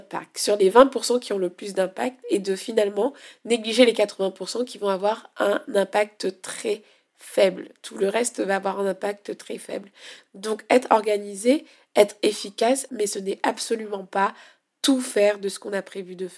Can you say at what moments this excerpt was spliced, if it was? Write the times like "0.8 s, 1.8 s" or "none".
10.3 s, 12.9 s